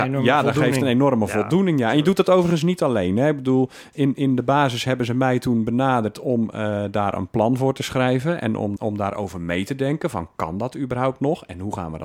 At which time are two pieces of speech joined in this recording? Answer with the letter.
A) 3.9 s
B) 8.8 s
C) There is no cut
B